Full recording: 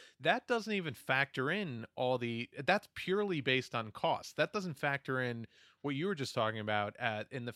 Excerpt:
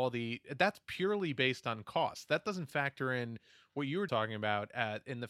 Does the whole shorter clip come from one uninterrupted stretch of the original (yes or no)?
no